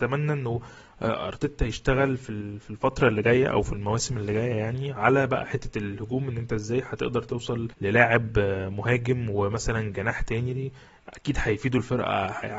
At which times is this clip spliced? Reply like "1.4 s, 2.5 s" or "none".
7.7 s